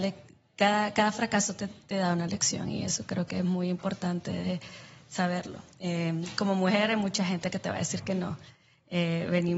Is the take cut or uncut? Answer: uncut